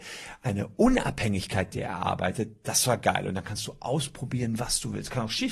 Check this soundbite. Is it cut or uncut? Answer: uncut